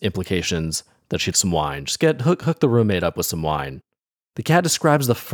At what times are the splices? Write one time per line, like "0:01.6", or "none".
0:01.3
0:04.3